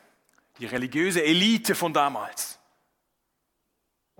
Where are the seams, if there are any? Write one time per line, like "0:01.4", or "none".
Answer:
none